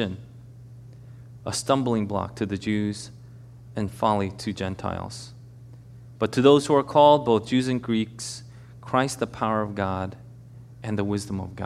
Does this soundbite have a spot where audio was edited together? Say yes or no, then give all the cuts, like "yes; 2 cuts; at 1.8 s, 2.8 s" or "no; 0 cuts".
yes; 1 cut; at 1.4 s